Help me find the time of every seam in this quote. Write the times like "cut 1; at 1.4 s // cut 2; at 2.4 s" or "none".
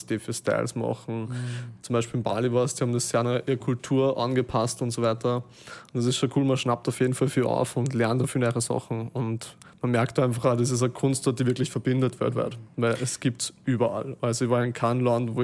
none